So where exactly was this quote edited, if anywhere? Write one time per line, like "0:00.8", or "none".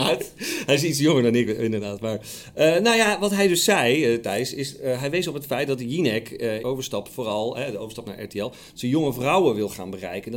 0:06.6